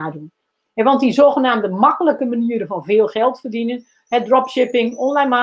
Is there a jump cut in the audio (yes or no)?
no